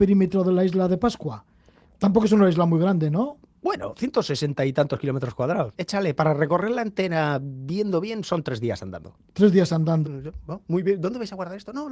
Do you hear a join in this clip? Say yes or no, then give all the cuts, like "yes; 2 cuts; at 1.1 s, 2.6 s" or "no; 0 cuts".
yes; 2 cuts; at 5.8 s, 10.0 s